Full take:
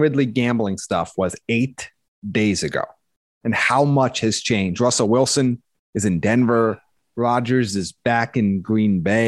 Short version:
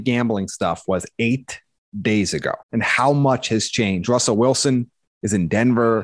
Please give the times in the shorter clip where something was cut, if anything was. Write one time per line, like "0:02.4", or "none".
0:02.6